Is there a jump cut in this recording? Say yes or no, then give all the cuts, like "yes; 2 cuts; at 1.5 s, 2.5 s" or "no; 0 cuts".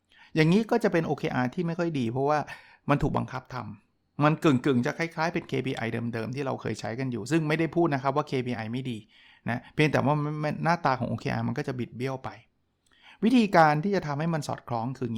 no; 0 cuts